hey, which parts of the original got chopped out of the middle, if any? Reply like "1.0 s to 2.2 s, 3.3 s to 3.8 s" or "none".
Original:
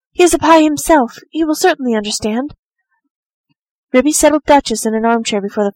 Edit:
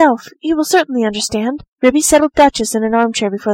2.6 s to 3.8 s